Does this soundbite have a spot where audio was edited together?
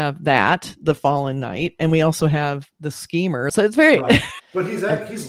yes; 1 cut; at 4.4 s

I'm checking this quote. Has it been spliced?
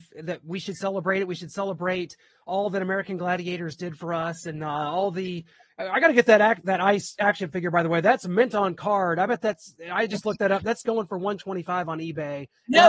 no; 0 cuts

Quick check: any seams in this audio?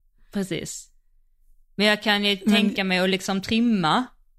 no; 0 cuts

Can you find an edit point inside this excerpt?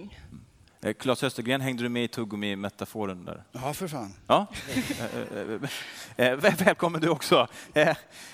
no; 0 cuts

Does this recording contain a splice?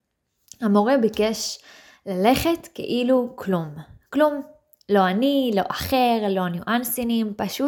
no; 0 cuts

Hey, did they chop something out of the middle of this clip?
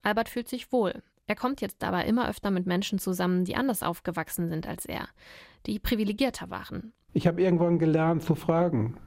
yes; 1 cut; at 7.1 s

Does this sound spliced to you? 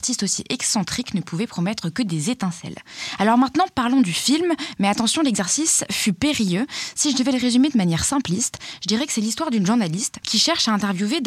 yes; 1 cut; at 10.2 s

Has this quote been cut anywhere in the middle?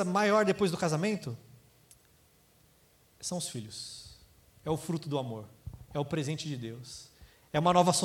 no; 0 cuts

